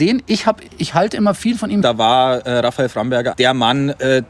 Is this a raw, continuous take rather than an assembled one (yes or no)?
no